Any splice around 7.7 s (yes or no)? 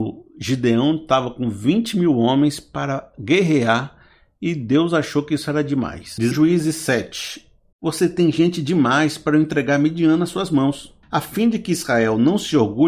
yes